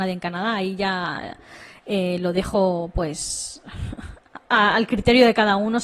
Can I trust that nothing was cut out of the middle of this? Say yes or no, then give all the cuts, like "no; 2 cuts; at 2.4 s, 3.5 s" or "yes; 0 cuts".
yes; 0 cuts